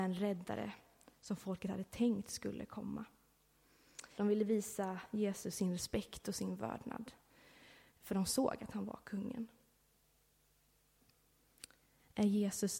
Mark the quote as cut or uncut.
cut